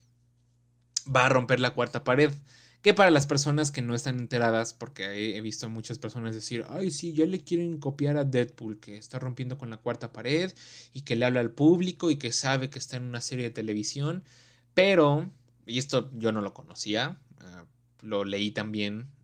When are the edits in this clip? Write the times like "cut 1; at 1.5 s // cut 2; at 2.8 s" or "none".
none